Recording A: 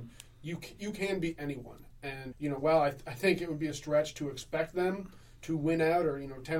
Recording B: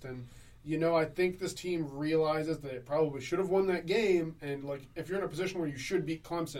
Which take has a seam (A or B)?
A